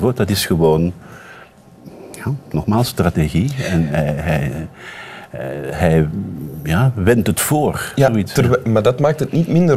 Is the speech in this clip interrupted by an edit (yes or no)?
no